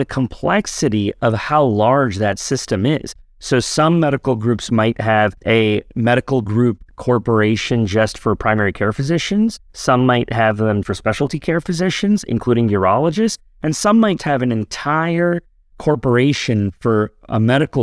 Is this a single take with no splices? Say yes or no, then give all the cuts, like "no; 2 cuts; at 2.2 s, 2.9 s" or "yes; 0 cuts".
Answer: no; 2 cuts; at 10.8 s, 14.2 s